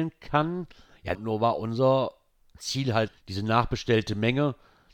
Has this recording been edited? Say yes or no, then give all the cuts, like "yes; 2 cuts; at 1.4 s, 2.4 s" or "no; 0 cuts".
yes; 2 cuts; at 1.1 s, 3.1 s